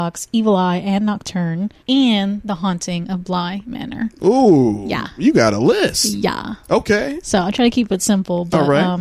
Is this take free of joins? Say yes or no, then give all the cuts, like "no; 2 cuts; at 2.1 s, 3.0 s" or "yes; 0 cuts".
no; 1 cut; at 1.8 s